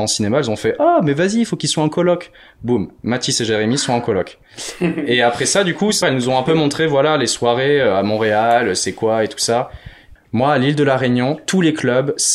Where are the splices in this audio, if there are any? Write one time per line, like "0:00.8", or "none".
0:06.0
0:10.2